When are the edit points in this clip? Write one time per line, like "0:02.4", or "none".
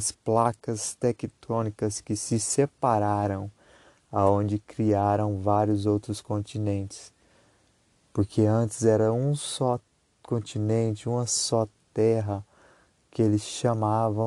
none